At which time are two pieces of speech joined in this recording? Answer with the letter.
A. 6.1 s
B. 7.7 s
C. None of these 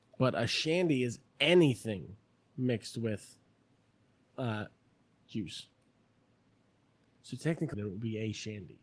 B